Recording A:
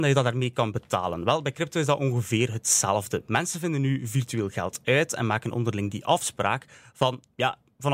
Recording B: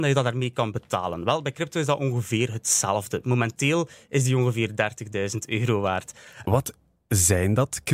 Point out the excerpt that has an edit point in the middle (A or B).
B